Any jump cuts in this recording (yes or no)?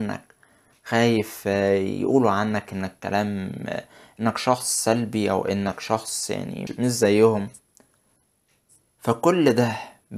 yes